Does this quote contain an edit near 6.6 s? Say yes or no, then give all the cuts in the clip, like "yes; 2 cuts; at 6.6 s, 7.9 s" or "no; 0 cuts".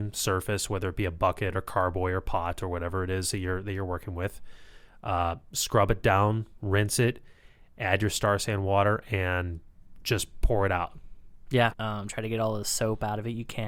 no; 1 cut; at 11.7 s